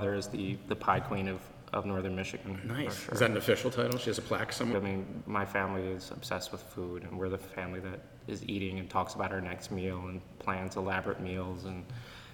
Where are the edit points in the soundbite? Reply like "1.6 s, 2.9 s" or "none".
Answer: 4.7 s

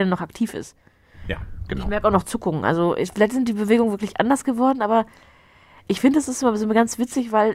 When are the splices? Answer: none

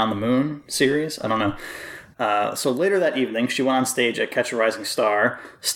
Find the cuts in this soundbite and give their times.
2.1 s

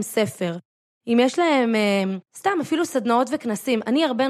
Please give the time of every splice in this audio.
2.3 s

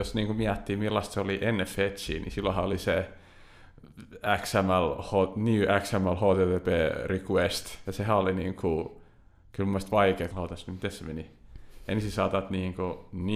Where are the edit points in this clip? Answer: 7.8 s, 10.3 s

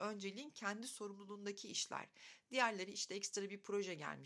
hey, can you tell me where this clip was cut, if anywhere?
none

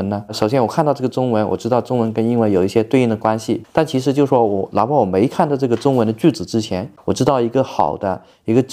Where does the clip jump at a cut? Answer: 3.6 s, 7.0 s

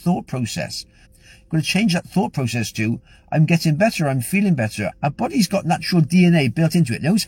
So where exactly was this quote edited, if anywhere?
1.1 s, 4.9 s

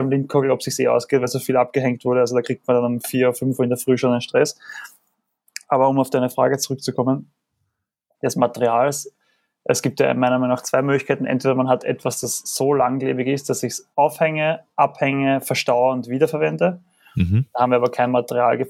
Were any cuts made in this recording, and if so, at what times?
13.9 s

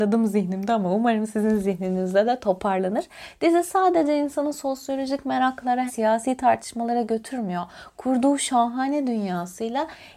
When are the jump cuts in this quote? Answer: 5.9 s

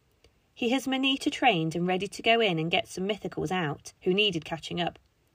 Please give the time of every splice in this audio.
4.0 s

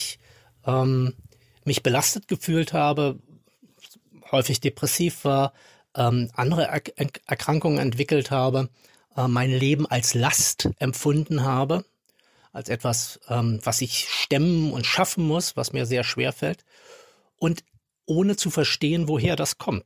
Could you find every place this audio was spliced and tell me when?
none

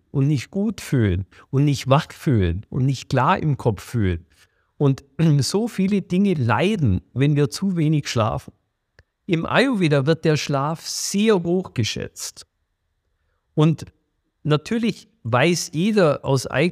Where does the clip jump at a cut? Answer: 9.1 s

